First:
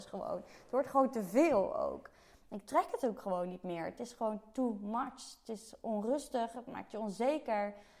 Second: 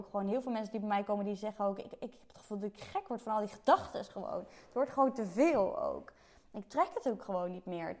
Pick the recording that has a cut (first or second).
first